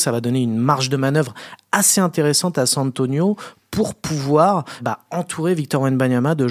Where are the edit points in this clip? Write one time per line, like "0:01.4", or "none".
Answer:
0:04.8